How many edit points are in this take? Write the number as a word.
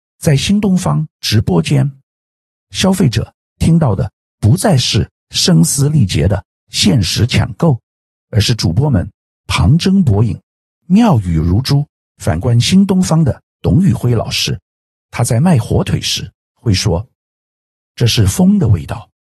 one